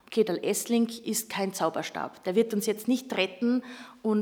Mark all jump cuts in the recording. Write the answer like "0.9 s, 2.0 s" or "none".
none